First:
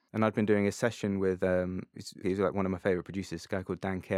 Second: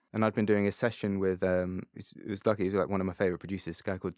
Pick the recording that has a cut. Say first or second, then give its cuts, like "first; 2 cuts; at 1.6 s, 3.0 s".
first; 1 cut; at 2.2 s